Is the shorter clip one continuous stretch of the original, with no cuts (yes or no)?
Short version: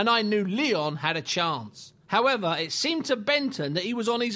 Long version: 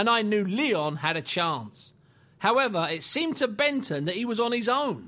no